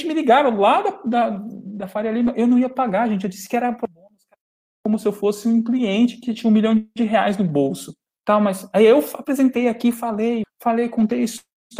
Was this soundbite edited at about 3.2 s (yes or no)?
no